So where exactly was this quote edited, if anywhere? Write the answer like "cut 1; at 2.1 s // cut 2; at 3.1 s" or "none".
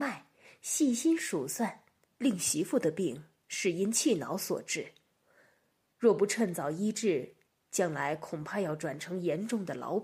cut 1; at 2.2 s